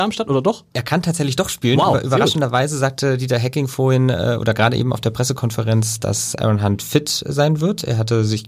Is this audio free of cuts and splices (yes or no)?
yes